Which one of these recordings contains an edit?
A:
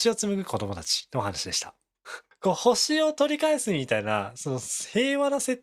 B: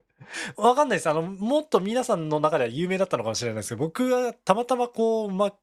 A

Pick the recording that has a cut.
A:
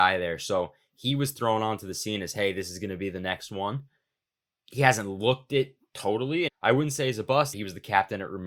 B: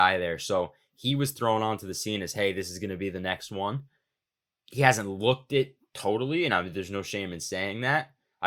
A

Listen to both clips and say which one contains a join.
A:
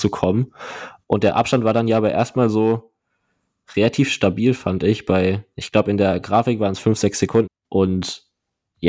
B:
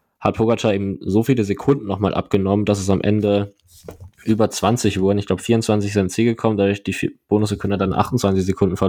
A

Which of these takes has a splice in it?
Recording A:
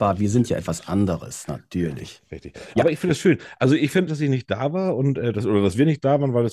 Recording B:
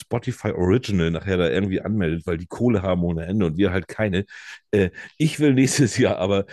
A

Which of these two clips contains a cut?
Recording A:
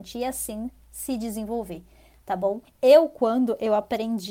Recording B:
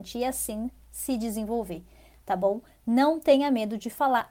A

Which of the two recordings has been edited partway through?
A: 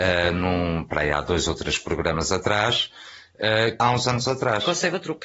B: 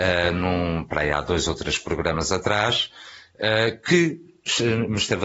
A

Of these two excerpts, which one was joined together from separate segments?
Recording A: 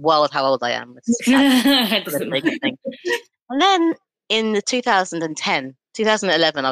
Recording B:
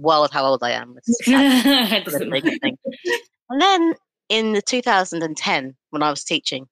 A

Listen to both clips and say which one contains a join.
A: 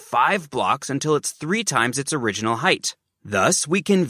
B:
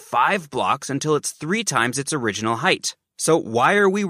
B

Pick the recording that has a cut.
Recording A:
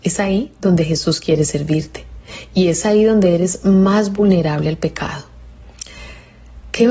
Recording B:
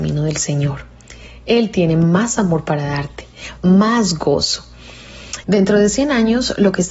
B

